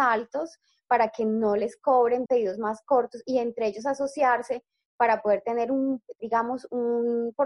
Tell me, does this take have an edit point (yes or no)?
yes